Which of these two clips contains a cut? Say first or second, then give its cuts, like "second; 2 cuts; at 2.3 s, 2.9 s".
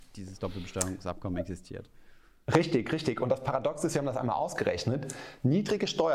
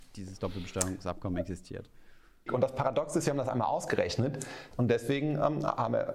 second; 2 cuts; at 2.5 s, 4.7 s